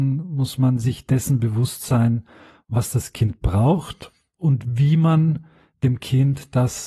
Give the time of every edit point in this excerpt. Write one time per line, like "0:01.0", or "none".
none